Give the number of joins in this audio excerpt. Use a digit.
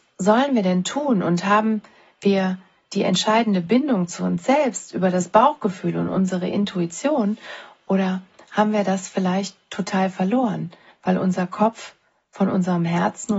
0